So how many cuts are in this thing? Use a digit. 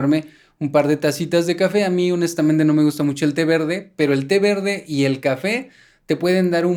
0